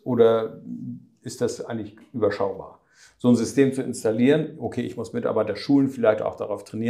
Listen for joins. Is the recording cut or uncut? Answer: uncut